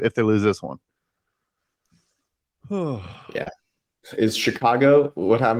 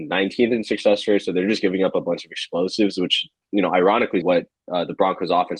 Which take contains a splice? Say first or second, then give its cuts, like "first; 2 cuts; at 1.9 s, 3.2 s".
second; 1 cut; at 4.2 s